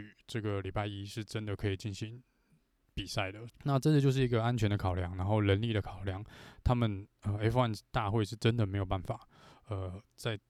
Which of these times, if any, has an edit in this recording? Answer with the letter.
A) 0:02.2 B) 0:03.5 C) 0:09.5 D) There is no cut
B